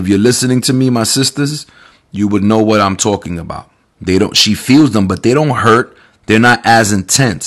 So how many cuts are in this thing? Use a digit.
1